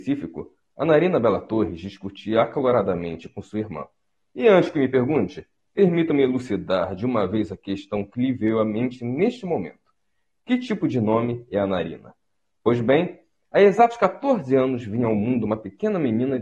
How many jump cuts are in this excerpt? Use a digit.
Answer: 0